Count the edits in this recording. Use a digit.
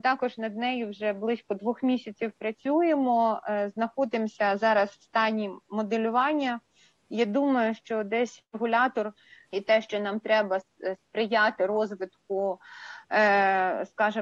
1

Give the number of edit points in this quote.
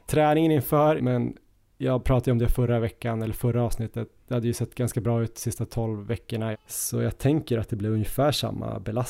2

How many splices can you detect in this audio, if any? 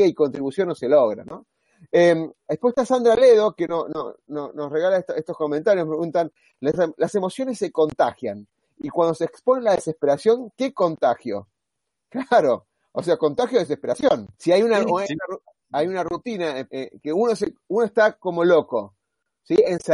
2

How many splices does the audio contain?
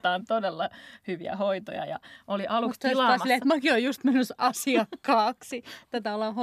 0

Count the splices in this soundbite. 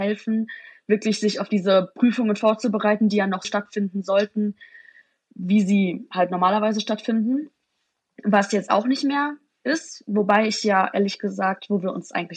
1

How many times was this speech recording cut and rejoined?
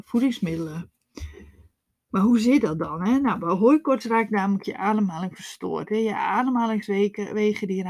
0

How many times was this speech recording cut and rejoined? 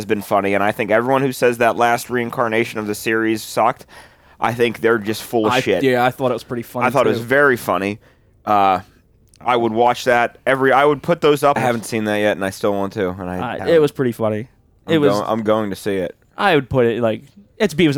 2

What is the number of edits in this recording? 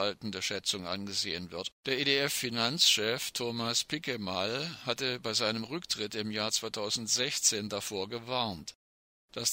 1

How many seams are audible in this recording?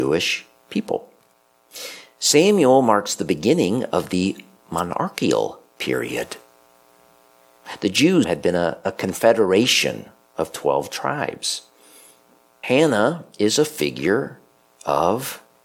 2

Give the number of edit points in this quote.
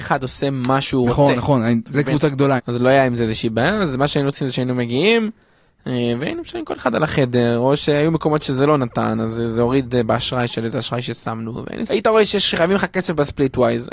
2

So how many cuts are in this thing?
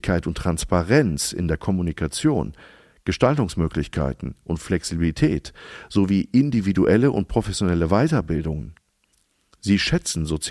0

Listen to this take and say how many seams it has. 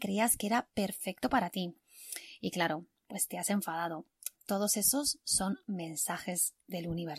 1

